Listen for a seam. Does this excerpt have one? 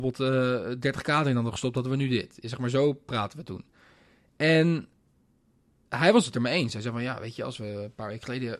no; 0 cuts

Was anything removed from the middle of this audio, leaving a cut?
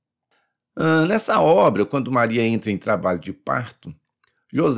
no; 0 cuts

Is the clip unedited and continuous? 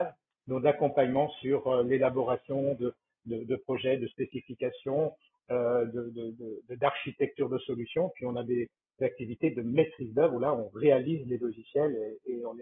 yes; 0 cuts

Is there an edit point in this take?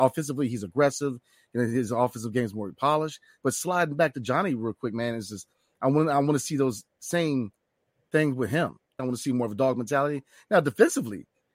yes; 1 cut; at 9.0 s

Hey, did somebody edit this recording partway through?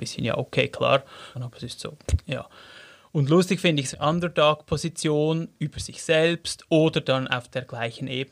yes; 2 cuts; at 1.3 s, 3.9 s

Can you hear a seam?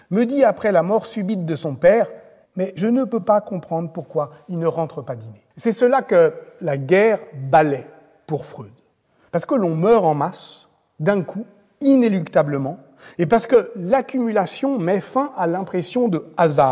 yes; 2 cuts; at 2.5 s, 5.5 s

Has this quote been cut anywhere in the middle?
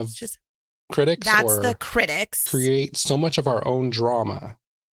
yes; 1 cut; at 2.5 s

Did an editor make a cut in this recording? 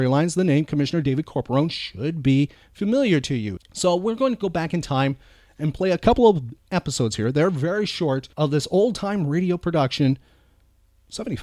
yes; 2 cuts; at 3.6 s, 8.3 s

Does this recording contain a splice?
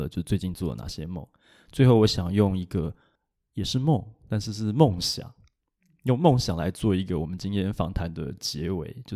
no; 0 cuts

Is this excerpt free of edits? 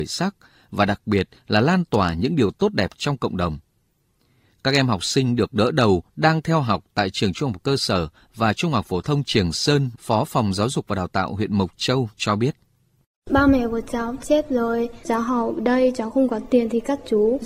no; 1 cut; at 9.9 s

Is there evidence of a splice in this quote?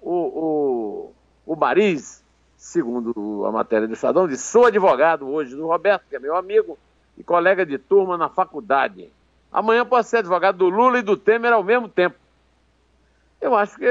no; 0 cuts

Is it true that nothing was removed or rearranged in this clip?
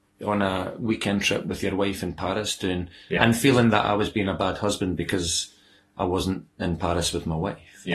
no; 1 cut; at 3.2 s

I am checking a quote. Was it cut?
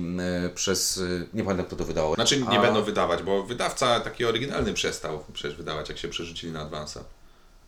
yes; 1 cut; at 2.1 s

